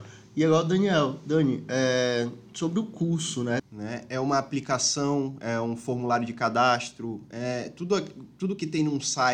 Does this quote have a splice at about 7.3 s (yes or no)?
no